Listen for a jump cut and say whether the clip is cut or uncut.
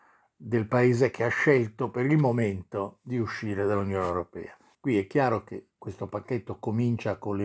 cut